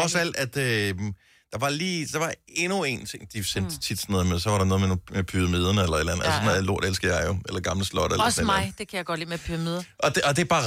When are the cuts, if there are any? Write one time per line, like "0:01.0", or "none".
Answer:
none